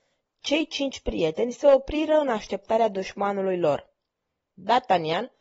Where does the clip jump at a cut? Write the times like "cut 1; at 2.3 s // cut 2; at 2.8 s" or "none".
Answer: none

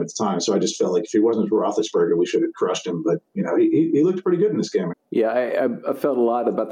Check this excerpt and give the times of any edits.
cut 1; at 4.9 s

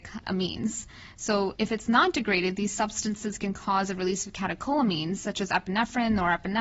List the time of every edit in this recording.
none

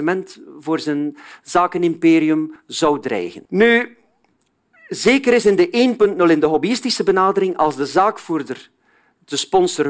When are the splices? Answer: cut 1; at 3.5 s

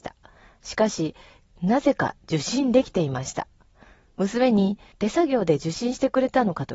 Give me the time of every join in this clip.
cut 1; at 1.4 s

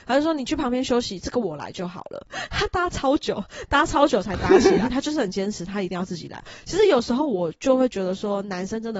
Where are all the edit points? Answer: cut 1; at 4.9 s

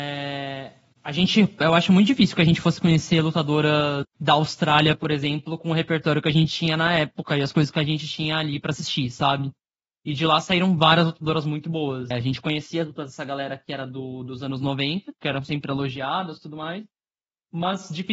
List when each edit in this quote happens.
cut 1; at 4.1 s // cut 2; at 12.1 s // cut 3; at 15.2 s

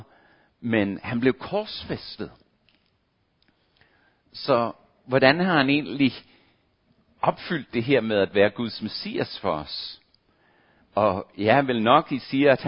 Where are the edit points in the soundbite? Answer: cut 1; at 10.8 s

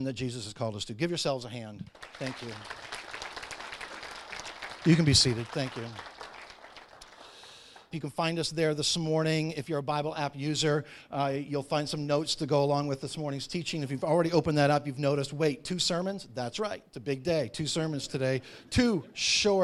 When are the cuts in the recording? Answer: cut 1; at 7.9 s

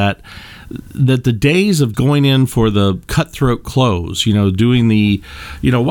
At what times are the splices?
cut 1; at 1.9 s

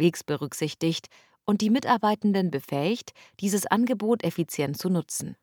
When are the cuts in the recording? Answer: none

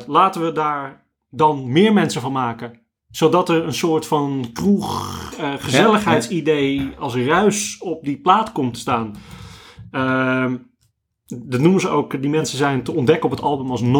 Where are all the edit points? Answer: none

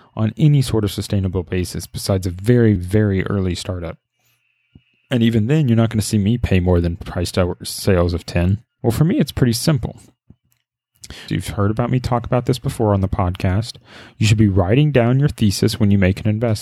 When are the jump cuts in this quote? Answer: cut 1; at 2.8 s // cut 2; at 8.8 s // cut 3; at 11.3 s

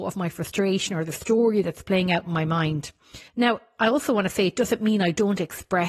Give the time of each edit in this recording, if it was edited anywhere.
cut 1; at 3.3 s

